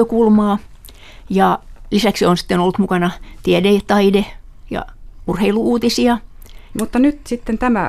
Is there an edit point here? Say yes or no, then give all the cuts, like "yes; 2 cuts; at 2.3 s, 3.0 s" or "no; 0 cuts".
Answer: yes; 1 cut; at 6.7 s